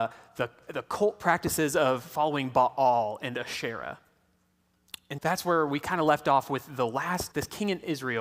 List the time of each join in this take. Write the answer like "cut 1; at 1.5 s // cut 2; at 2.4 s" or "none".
cut 1; at 5.2 s // cut 2; at 7.3 s